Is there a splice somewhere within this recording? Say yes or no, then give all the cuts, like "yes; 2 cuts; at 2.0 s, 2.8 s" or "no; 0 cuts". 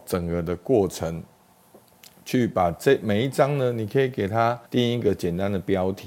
yes; 1 cut; at 4.7 s